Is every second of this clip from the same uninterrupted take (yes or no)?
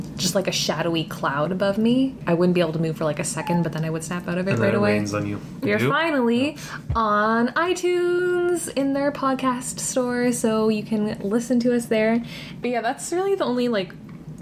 no